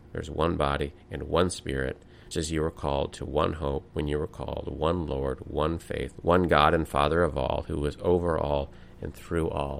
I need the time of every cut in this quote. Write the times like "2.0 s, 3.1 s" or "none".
2.3 s, 6.2 s